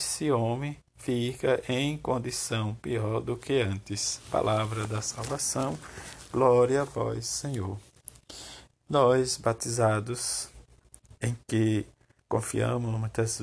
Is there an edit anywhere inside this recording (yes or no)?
no